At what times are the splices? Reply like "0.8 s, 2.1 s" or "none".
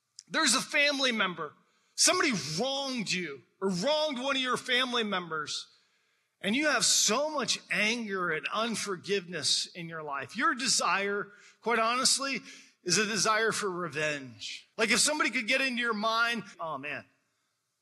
14.7 s, 16.5 s